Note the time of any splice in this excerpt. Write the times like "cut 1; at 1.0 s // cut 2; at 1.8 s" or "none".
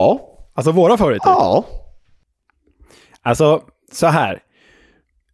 none